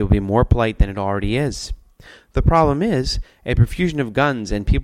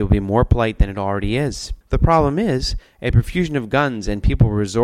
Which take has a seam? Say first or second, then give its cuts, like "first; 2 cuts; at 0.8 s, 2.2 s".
second; 1 cut; at 1.8 s